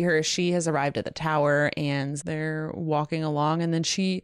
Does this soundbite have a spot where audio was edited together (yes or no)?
yes